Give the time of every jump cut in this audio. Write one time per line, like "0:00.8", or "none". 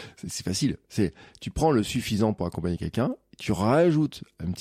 none